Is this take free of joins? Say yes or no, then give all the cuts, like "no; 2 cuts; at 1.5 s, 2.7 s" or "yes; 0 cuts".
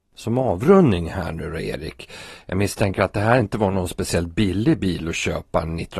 yes; 0 cuts